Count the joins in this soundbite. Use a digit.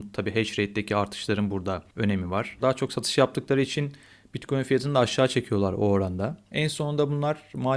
1